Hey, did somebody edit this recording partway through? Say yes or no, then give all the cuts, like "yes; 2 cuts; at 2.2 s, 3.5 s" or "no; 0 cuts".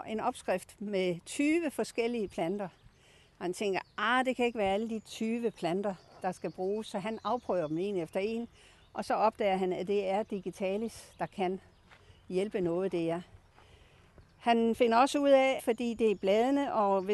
yes; 1 cut; at 15.6 s